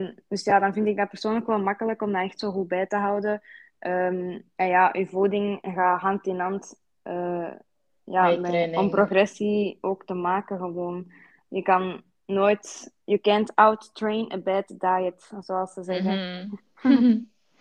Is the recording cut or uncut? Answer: cut